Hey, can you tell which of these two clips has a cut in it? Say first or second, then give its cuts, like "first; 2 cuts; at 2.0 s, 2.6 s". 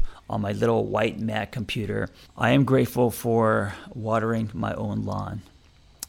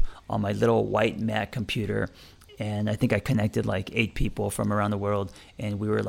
first; 1 cut; at 2.3 s